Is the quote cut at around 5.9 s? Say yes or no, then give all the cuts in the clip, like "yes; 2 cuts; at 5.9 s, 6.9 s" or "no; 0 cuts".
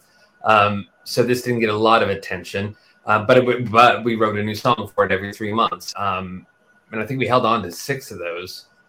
yes; 1 cut; at 5.9 s